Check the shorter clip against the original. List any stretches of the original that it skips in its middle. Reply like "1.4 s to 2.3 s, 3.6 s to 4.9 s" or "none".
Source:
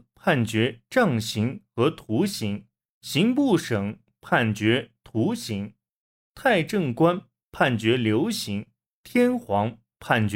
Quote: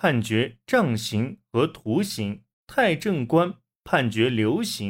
2.8 s to 6.2 s